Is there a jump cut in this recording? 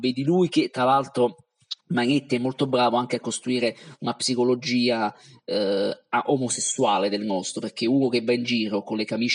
no; 0 cuts

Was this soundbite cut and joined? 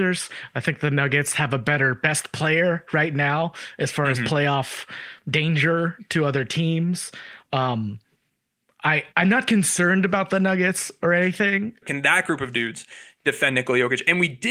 yes; 2 cuts; at 9.1 s, 11.8 s

